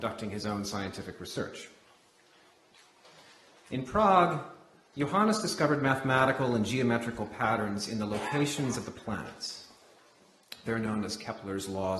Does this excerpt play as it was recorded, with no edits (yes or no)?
yes